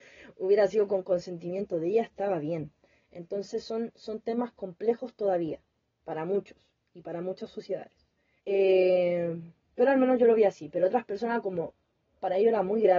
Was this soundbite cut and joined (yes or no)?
yes